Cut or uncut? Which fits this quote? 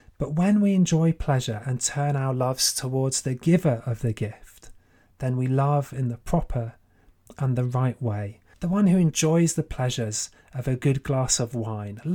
cut